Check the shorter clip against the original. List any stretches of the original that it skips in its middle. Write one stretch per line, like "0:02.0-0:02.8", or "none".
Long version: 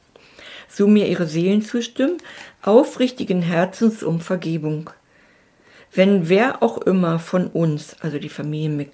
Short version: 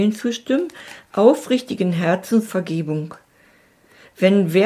0:04.0-0:04.2

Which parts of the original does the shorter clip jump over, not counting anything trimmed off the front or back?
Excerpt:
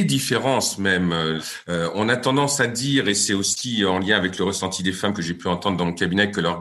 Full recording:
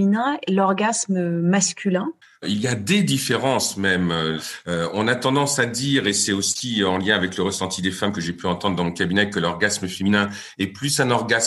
none

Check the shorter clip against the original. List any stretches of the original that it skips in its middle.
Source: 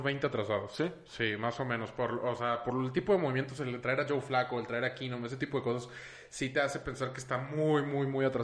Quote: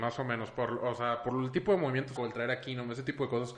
0:03.6-0:04.5

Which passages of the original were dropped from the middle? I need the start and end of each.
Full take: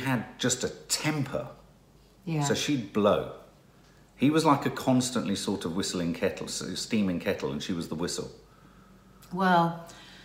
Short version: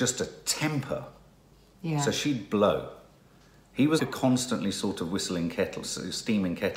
0:04.4-0:04.6

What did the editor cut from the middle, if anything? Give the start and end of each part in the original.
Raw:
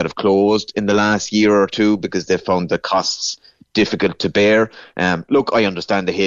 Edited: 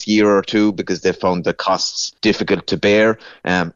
0:03.4-0:03.7

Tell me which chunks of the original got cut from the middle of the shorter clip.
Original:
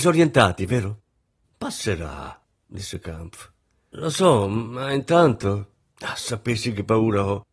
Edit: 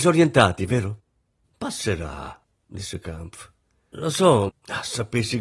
0:04.5-0:05.8

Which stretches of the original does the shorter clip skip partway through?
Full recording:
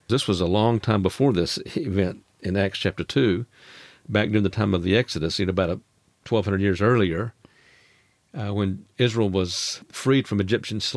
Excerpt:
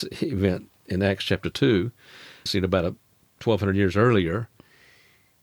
0:04.0-0:05.3

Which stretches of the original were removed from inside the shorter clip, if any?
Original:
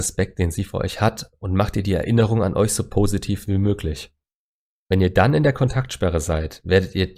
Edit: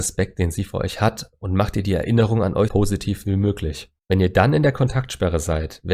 0:02.7-0:02.9
0:04.2-0:04.8

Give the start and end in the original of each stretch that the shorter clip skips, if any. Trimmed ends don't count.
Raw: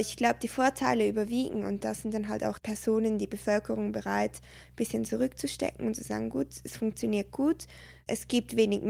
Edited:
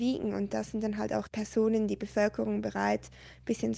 none

